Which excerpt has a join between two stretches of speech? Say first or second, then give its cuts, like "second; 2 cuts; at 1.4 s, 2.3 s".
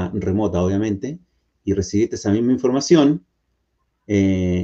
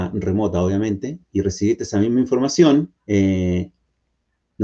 second; 2 cuts; at 1.2 s, 3.0 s